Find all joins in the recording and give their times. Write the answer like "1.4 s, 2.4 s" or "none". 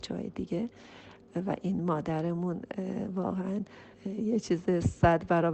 3.9 s